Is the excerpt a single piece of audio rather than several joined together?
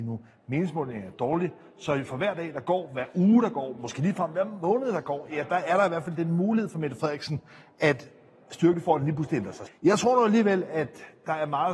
no; 1 cut; at 9.7 s

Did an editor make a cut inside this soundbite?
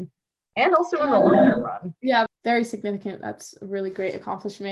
yes; 1 cut; at 2.3 s

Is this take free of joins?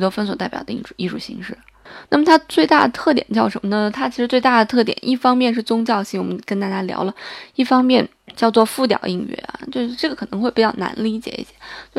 yes; 0 cuts

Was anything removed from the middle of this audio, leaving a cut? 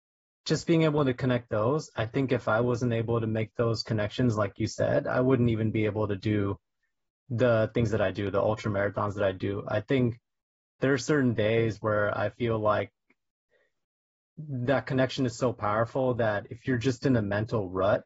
no; 0 cuts

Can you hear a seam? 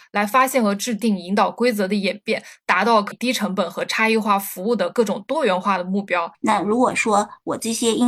yes; 2 cuts; at 3.1 s, 6.3 s

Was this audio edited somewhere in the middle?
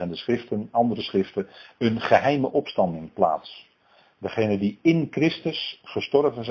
no; 0 cuts

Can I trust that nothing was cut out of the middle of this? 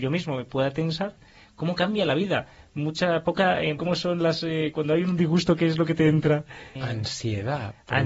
no; 2 cuts; at 3.8 s, 6.8 s

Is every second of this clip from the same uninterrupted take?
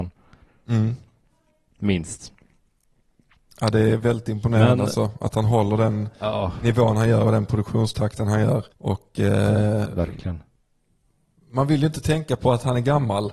no; 2 cuts; at 8.7 s, 9.8 s

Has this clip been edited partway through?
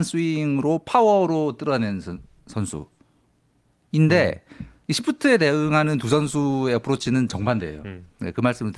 no; 0 cuts

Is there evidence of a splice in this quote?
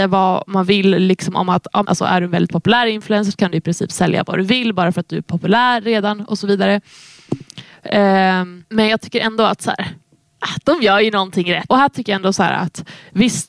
yes; 3 cuts; at 1.8 s, 8.6 s, 11.7 s

